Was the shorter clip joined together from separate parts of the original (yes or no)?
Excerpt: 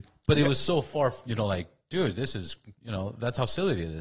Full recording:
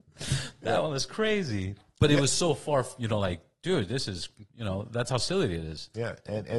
no